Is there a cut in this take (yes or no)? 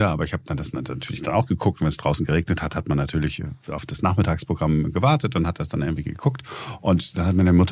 no